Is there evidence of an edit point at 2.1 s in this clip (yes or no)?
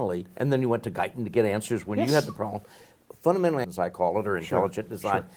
no